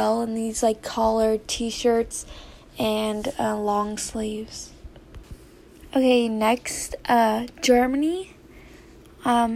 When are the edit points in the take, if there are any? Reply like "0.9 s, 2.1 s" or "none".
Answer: none